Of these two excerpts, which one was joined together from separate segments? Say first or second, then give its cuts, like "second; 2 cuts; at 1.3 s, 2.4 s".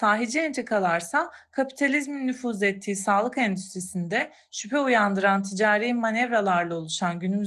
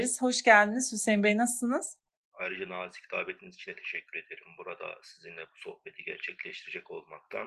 second; 1 cut; at 2.2 s